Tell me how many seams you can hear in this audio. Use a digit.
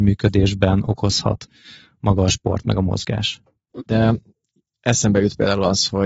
1